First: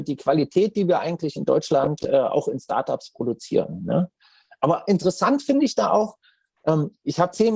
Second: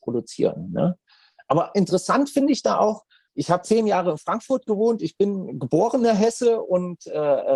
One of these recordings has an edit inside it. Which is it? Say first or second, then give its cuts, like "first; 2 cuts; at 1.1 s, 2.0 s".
second; 1 cut; at 3.3 s